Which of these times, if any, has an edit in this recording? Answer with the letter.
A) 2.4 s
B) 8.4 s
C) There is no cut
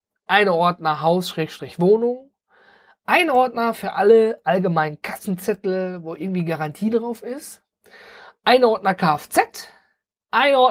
C